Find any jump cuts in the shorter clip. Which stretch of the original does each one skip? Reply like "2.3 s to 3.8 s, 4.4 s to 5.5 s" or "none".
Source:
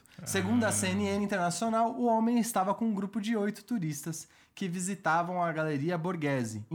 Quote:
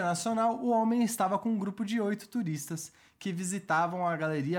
none